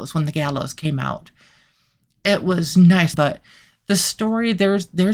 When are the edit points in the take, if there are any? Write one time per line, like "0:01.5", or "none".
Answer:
0:03.1